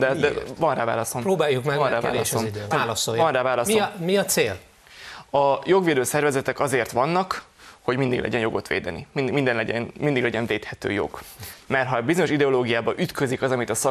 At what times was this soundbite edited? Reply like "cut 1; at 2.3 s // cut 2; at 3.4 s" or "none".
cut 1; at 2.7 s // cut 2; at 11.6 s